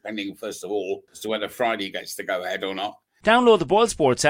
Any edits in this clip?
yes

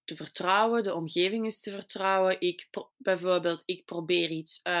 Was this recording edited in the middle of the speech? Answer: yes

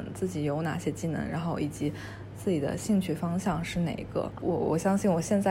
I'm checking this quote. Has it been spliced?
yes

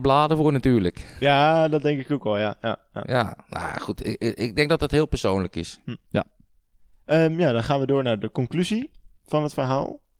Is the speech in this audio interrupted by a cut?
no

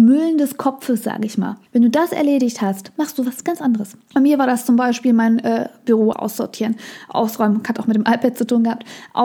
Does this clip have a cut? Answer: yes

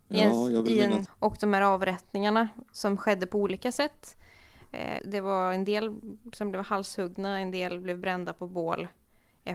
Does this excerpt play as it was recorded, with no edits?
no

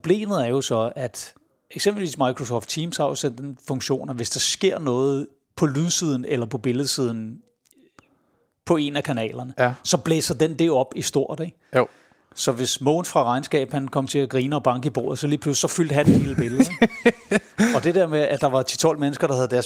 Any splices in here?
no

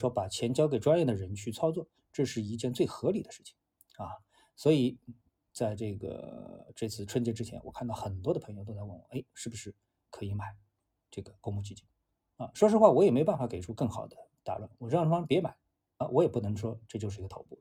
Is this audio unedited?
yes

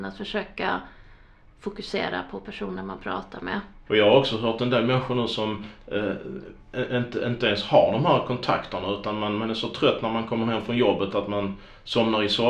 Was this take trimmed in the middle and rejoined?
yes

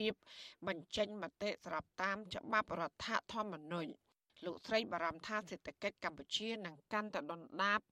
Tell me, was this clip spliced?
no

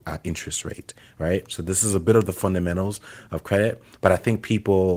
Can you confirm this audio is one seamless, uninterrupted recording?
yes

